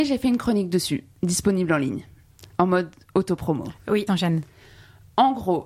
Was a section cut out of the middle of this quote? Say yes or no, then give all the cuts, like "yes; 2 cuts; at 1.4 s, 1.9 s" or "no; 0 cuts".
yes; 1 cut; at 4.1 s